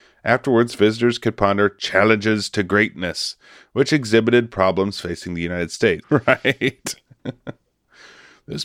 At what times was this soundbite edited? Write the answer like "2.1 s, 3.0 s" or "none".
6.0 s